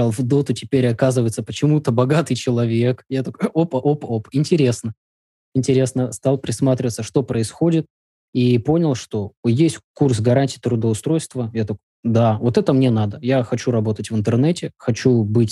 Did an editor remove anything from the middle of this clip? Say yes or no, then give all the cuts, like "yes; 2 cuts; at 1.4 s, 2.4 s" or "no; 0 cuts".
no; 0 cuts